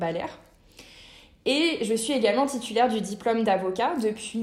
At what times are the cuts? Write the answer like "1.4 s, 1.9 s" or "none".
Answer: none